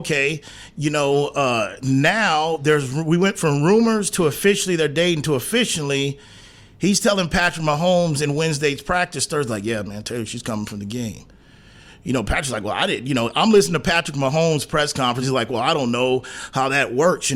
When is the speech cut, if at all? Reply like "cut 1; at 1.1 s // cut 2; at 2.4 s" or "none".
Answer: none

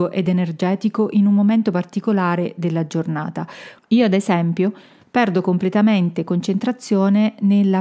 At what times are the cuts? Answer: cut 1; at 3.8 s

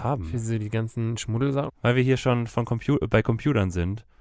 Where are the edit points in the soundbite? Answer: cut 1; at 1.7 s

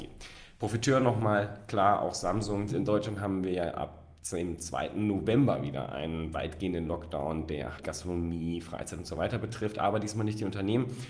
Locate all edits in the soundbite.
cut 1; at 2.7 s // cut 2; at 7.8 s

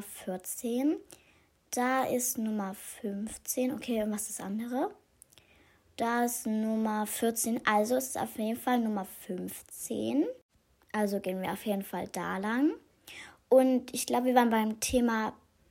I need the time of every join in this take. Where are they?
none

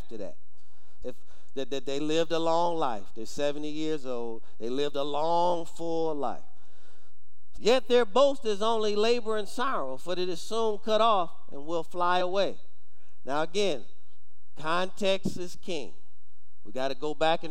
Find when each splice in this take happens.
cut 1; at 1.0 s // cut 2; at 7.6 s

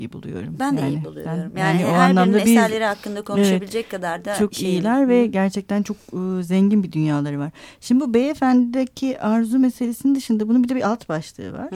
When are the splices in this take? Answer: cut 1; at 1.3 s

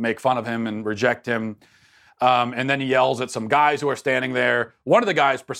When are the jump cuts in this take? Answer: none

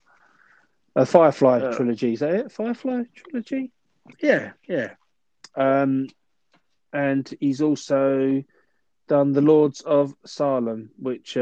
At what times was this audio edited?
cut 1; at 4.1 s

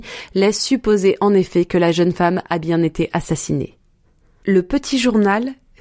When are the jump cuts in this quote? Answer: cut 1; at 4.4 s

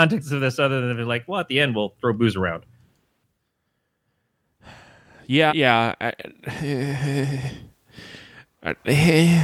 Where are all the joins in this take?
cut 1; at 5.5 s

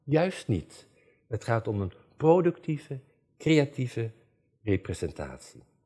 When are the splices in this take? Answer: none

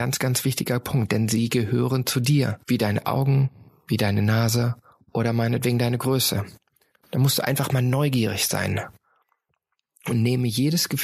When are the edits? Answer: cut 1; at 6.9 s

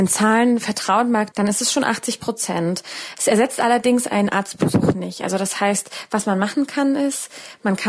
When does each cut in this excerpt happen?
cut 1; at 1.3 s

